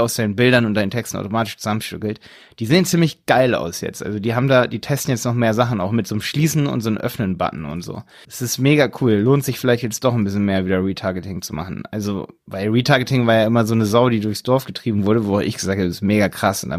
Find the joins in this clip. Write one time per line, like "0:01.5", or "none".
0:08.2